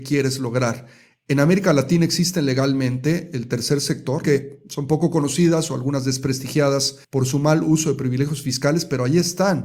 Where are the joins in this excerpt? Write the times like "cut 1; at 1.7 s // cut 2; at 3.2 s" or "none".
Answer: cut 1; at 4.2 s // cut 2; at 7.0 s